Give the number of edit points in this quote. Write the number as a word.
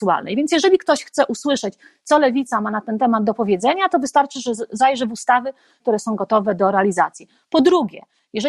one